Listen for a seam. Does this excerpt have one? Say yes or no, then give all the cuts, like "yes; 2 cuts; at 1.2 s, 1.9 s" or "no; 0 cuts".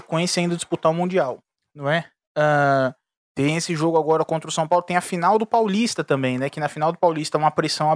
no; 0 cuts